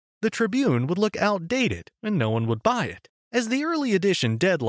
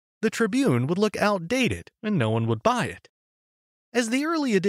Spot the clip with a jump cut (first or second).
first